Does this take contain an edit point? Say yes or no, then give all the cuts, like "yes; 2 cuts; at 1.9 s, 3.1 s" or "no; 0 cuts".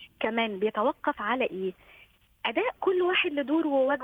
no; 0 cuts